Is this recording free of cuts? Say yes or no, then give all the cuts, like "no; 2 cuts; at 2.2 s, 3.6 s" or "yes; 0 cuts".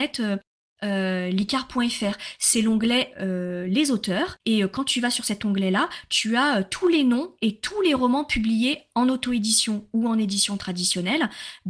yes; 0 cuts